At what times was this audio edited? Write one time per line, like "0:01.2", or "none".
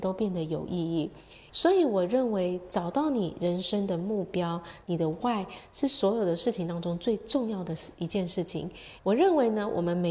0:01.5
0:04.8
0:09.0

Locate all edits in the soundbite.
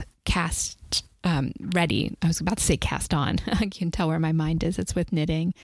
none

